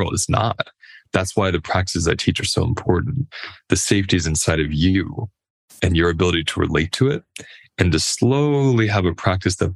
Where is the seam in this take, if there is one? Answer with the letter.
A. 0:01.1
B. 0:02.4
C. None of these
C